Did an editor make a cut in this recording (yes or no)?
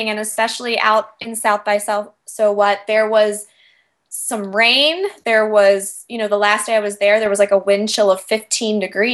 no